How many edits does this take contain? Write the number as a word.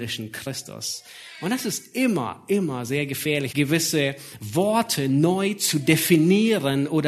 one